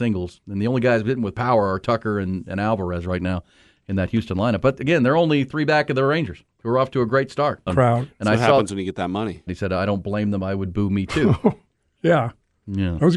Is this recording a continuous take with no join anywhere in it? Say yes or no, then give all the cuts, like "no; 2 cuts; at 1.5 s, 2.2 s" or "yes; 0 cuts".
no; 3 cuts; at 6.5 s, 7.7 s, 9.5 s